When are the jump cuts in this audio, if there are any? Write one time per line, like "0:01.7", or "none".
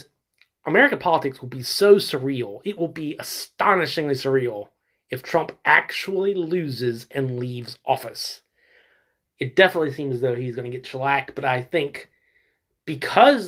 0:09.3